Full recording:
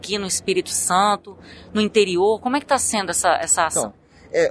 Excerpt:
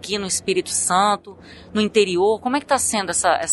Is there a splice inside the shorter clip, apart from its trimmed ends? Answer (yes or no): no